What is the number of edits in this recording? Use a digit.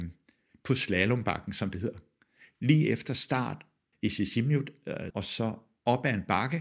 1